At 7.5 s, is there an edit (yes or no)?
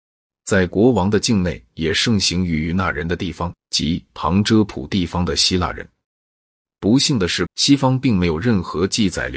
yes